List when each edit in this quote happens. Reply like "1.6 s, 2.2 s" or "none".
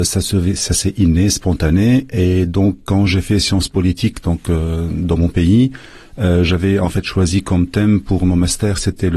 2.8 s